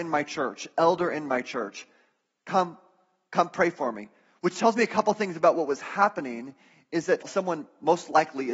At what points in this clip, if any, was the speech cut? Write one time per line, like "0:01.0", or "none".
0:07.2

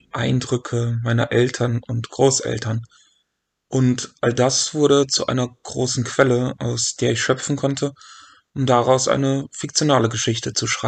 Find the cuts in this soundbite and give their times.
none

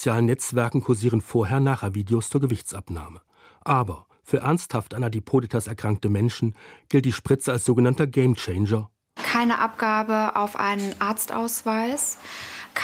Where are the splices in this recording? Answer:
0:09.2

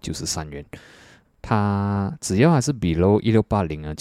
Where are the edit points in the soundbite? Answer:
0:01.2

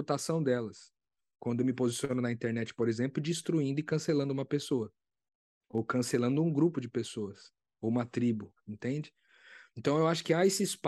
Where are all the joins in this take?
none

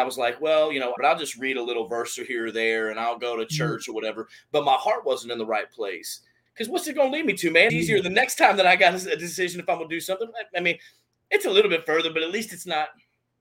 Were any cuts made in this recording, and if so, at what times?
0:01.0
0:06.5
0:07.7

